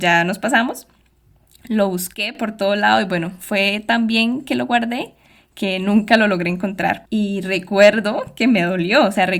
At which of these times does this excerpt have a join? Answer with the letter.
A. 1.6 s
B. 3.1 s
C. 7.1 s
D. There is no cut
C